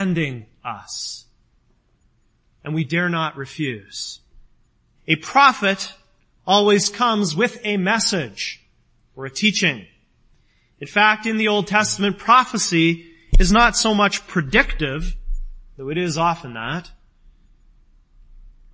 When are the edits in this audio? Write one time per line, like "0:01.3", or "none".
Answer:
0:05.0